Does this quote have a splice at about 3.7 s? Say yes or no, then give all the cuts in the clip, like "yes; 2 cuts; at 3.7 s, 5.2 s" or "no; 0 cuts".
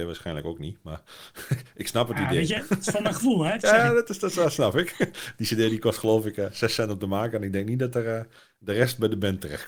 no; 0 cuts